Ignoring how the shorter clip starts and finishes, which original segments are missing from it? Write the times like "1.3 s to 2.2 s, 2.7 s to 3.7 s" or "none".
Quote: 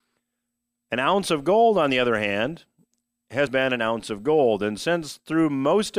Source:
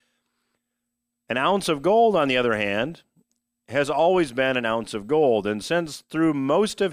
3.9 s to 4.3 s